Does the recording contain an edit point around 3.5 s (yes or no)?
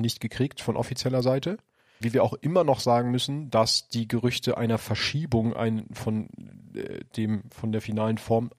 no